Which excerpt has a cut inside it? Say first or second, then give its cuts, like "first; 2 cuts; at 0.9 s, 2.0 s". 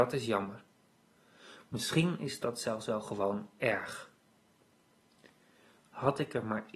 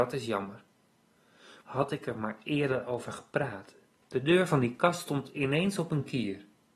second; 2 cuts; at 1.6 s, 4.0 s